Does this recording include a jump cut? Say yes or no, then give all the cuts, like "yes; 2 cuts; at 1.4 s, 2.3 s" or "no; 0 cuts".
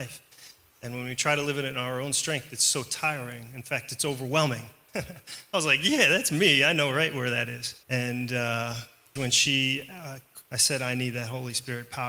yes; 3 cuts; at 7.8 s, 9.2 s, 10.5 s